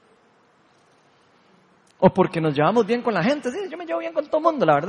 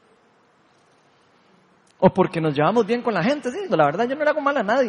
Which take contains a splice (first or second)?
second